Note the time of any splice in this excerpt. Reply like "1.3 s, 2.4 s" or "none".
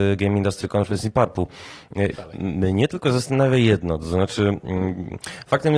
2.1 s